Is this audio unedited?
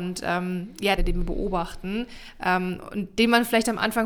no; 1 cut; at 1.0 s

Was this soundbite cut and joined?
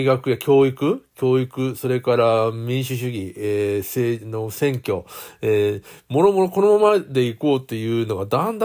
no; 0 cuts

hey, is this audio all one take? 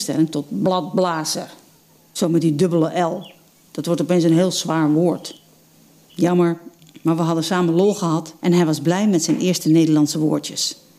no; 2 cuts; at 6.1 s, 8.4 s

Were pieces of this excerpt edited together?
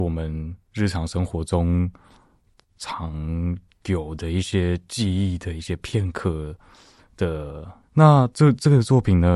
yes; 1 cut; at 7.8 s

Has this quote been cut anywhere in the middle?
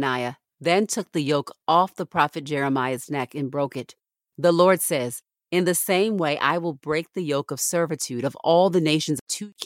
yes; 1 cut; at 4.3 s

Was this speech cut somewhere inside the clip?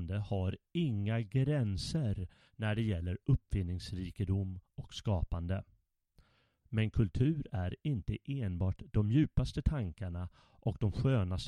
yes; 1 cut; at 6.6 s

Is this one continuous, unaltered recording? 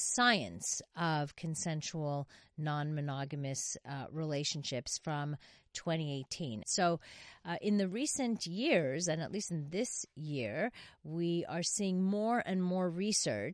no; 1 cut; at 6.6 s

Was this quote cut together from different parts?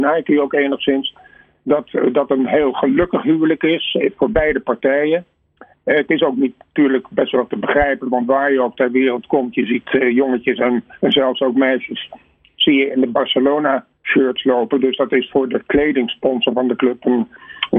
no; 0 cuts

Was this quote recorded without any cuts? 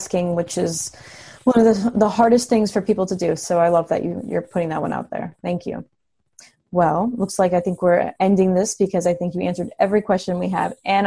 yes; 0 cuts

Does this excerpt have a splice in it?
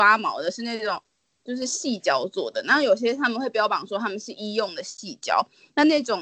no; 0 cuts

